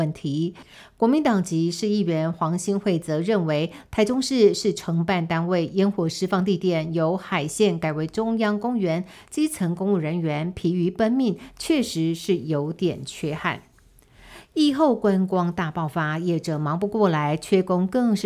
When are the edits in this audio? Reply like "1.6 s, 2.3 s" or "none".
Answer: none